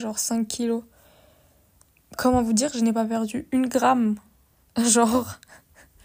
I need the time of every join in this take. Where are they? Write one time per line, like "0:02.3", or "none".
none